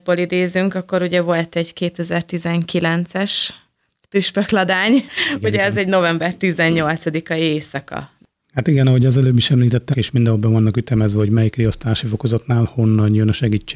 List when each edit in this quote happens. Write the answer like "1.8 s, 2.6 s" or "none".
9.9 s